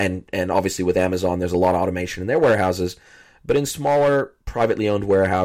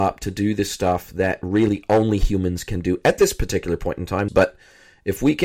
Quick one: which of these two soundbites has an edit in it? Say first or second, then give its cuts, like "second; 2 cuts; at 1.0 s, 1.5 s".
second; 1 cut; at 4.3 s